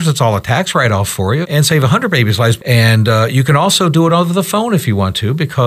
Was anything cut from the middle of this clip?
yes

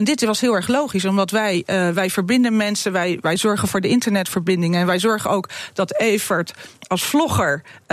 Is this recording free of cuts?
yes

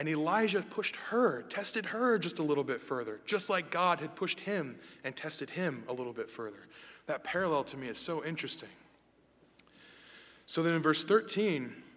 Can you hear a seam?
no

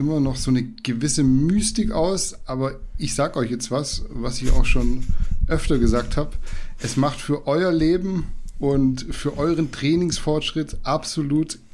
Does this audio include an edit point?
no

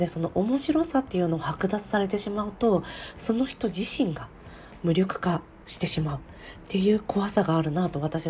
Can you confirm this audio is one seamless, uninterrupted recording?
yes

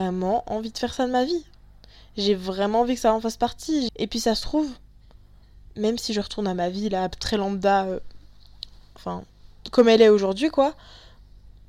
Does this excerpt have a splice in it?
yes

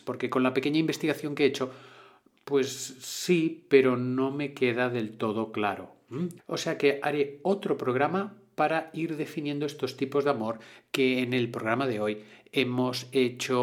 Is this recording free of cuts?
no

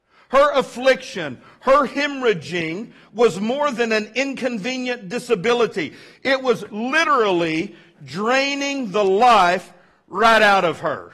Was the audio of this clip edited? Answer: no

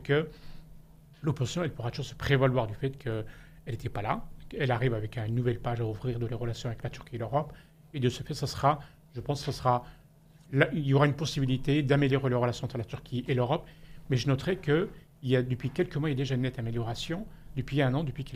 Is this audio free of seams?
yes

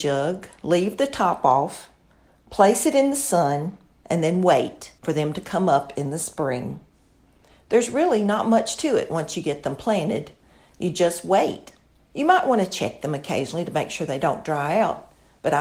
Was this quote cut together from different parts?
no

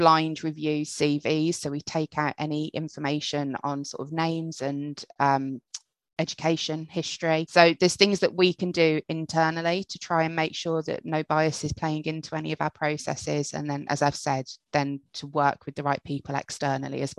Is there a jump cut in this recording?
no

